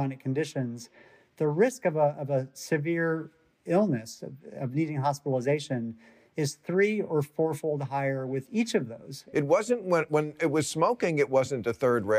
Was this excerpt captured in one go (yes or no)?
no